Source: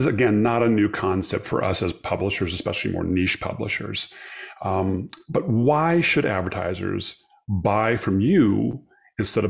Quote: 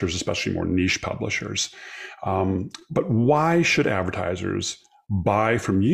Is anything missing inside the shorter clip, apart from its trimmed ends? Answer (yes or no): no